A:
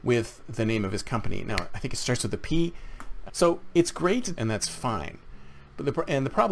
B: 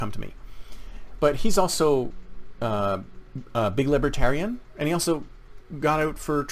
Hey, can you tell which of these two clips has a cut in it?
A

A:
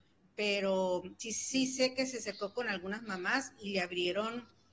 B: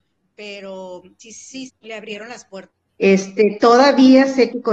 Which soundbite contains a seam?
B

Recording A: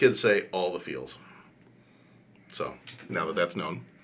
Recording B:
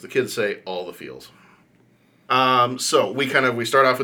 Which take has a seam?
B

